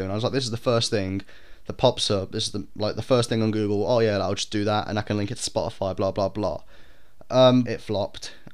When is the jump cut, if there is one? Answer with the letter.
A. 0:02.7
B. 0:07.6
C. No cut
B